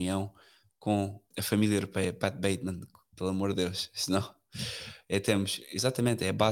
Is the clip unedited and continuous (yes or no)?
no